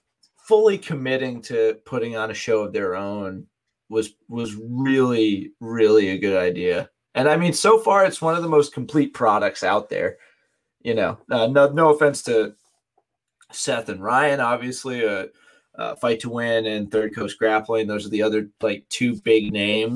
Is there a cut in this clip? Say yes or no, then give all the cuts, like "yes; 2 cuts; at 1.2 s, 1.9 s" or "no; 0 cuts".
yes; 1 cut; at 5.6 s